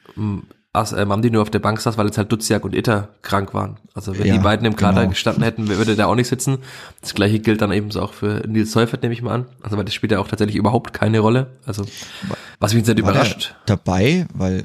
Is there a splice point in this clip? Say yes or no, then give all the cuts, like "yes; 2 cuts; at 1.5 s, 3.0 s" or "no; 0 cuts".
yes; 1 cut; at 12.5 s